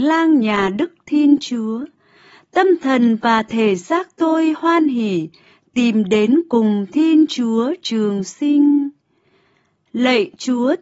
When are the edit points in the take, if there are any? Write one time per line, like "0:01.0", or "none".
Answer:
none